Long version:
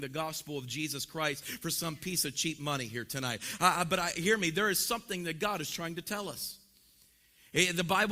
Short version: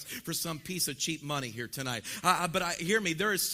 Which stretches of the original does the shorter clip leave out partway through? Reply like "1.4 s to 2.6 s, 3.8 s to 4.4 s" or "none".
none